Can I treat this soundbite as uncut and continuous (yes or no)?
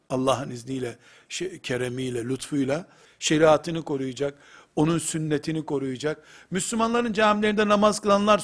no